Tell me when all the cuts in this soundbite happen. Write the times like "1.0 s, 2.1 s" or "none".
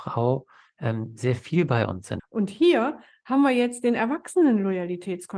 2.2 s